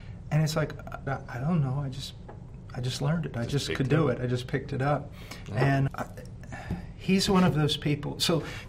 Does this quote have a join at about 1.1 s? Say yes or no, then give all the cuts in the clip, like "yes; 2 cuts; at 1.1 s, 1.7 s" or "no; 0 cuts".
yes; 2 cuts; at 1.1 s, 5.9 s